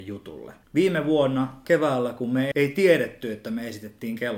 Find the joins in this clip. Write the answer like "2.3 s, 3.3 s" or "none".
2.5 s